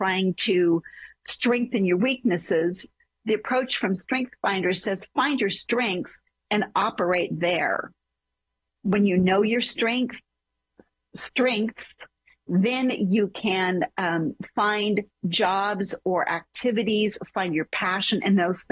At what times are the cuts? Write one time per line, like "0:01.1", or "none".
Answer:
none